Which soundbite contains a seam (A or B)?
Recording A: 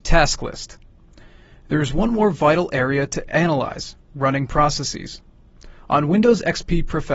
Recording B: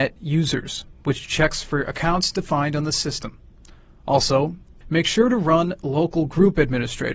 B